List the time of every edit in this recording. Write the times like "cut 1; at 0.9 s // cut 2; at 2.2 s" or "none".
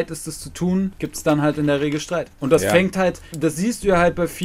cut 1; at 3.3 s